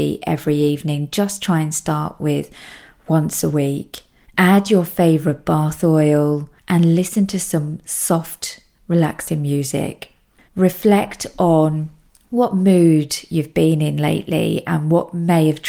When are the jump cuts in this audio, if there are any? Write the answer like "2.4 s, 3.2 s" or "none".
6.6 s, 10.4 s